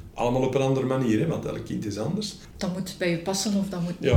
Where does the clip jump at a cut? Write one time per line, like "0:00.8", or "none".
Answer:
0:02.5

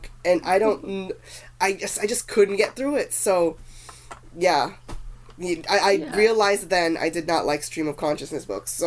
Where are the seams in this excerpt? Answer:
none

